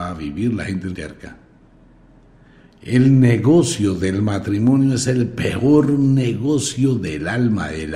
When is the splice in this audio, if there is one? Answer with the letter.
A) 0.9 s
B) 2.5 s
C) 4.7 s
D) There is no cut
A